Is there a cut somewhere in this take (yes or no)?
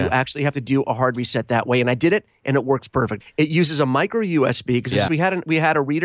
yes